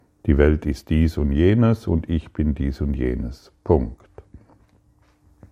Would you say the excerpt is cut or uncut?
uncut